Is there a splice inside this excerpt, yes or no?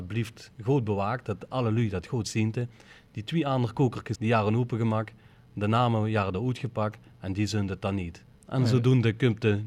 yes